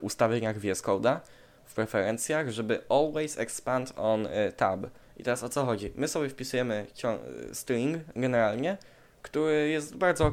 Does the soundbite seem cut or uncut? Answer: cut